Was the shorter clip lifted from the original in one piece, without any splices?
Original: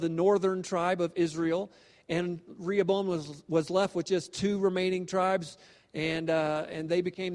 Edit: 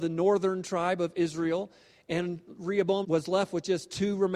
no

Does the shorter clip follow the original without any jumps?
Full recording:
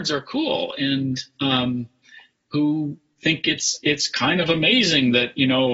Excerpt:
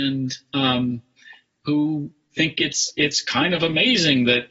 yes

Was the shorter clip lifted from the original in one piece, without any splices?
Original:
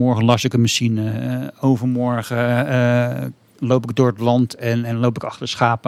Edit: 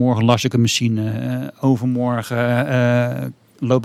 yes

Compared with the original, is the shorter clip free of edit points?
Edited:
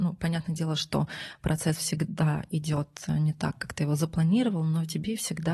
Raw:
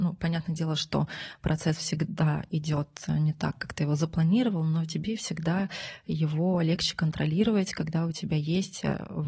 yes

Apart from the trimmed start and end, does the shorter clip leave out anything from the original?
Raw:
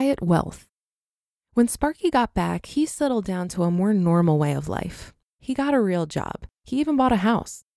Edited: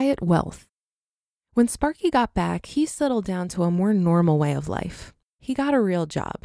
no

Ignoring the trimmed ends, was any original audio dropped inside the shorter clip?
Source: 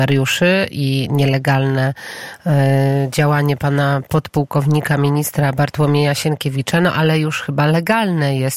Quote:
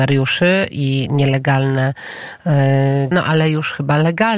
yes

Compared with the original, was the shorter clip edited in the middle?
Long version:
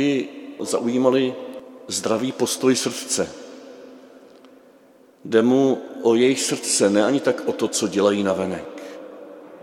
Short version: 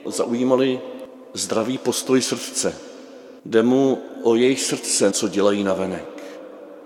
yes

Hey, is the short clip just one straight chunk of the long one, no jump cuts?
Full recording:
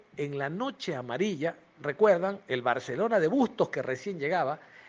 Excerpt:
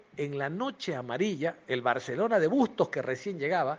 no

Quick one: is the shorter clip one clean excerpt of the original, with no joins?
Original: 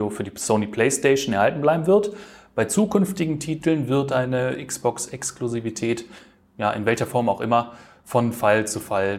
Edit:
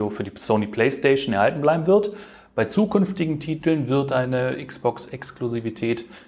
yes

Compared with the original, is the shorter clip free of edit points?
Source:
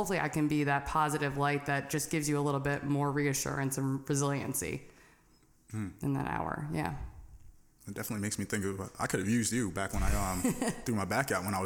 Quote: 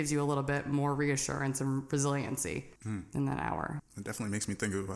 no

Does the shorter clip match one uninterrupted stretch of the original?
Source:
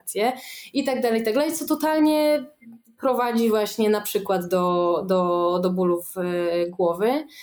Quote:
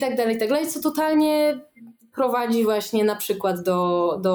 yes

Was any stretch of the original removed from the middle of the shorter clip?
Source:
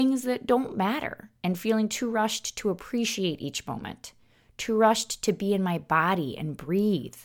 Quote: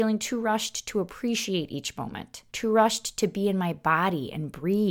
yes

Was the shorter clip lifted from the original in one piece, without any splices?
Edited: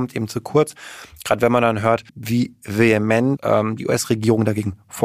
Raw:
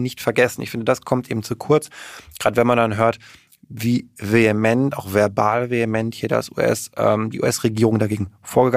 no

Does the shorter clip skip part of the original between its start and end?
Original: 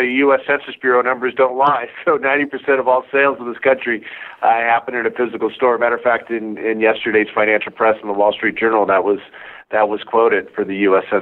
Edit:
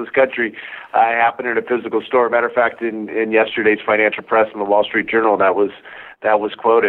no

